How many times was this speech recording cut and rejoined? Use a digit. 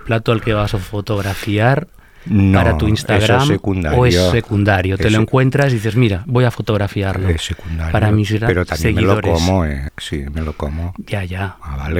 1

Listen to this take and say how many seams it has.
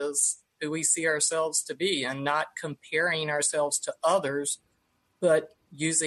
0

